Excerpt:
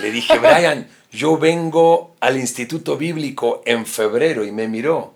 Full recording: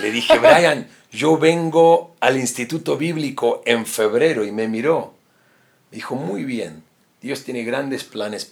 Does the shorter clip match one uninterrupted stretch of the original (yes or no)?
yes